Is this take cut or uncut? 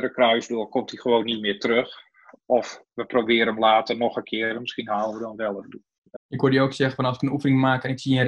cut